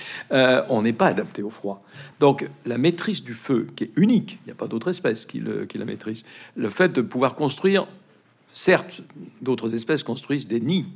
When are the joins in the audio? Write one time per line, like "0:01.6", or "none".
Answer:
0:02.1